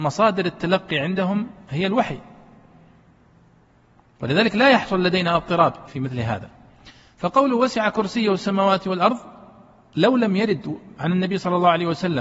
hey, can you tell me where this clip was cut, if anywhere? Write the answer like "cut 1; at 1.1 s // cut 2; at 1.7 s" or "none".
cut 1; at 5.9 s